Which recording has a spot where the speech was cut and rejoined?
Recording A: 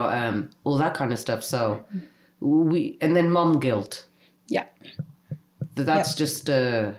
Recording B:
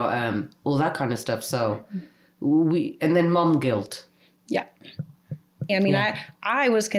B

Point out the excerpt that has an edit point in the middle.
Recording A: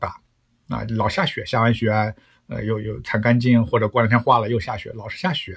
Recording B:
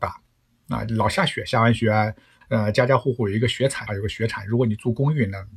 B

